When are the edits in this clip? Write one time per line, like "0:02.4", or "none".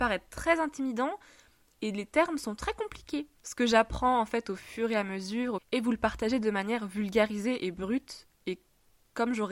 0:03.4
0:05.6